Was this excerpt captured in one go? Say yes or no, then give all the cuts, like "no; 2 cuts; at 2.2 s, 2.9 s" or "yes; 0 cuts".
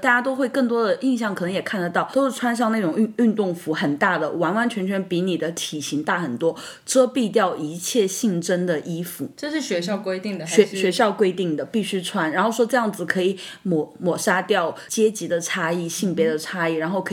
yes; 0 cuts